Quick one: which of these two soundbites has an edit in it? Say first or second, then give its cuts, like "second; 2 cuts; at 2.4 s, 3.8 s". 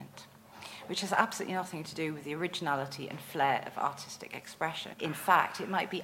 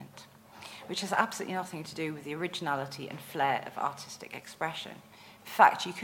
first; 1 cut; at 4.9 s